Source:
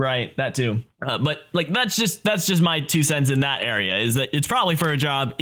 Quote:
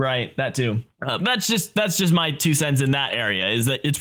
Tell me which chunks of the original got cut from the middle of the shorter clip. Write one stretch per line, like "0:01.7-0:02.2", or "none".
0:01.2-0:01.7

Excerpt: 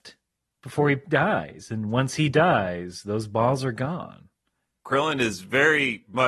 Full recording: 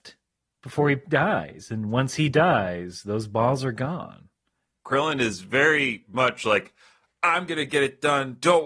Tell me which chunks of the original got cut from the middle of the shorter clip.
none

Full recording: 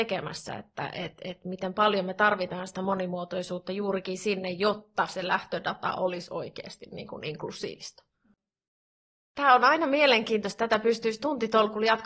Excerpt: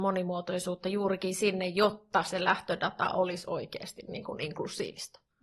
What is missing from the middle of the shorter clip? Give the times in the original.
none

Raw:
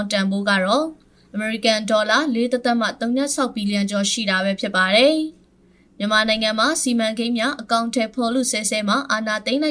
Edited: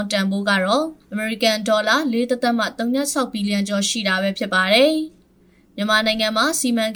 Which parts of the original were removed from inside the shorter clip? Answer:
0:01.0-0:01.2

